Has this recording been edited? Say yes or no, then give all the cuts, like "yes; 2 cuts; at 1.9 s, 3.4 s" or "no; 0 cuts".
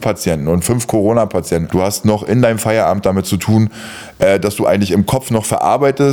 yes; 1 cut; at 1.7 s